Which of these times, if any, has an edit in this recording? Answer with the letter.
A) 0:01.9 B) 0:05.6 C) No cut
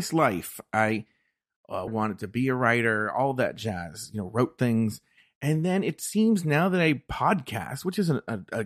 A